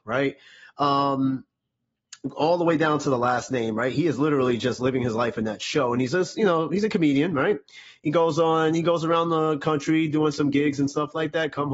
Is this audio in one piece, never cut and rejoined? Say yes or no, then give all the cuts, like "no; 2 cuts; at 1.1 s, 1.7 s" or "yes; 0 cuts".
yes; 0 cuts